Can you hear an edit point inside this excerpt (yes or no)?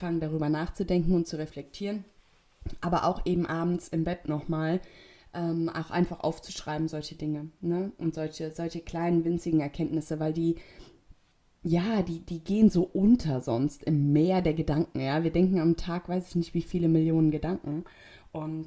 no